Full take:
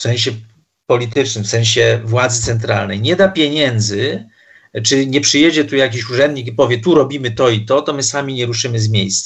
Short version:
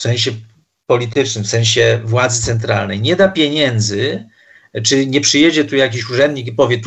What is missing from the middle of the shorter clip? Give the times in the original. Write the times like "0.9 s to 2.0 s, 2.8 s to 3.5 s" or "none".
none